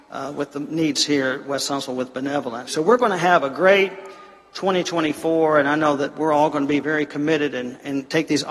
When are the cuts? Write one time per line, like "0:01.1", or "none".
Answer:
0:02.7